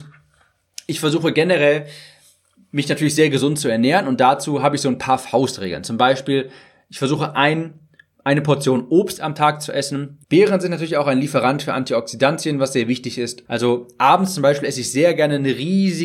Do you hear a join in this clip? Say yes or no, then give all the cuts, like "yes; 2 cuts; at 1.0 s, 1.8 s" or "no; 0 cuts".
yes; 2 cuts; at 10.2 s, 13.4 s